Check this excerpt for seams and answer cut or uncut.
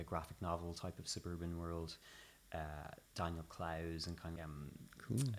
cut